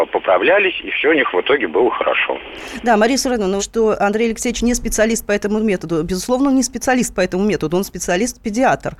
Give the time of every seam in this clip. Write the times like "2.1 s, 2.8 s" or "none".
3.6 s